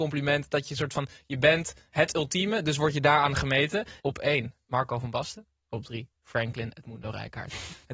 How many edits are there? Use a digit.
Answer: 2